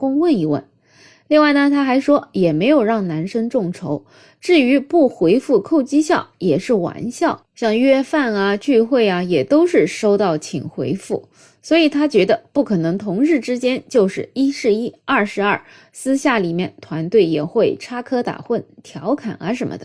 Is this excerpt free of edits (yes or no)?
yes